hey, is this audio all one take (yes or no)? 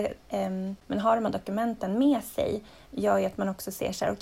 yes